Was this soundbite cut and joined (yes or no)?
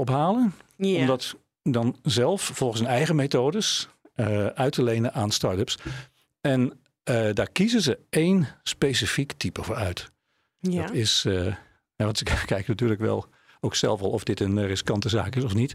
no